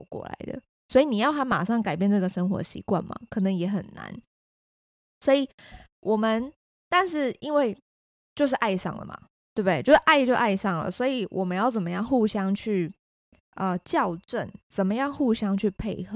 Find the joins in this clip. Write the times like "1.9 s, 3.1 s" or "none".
none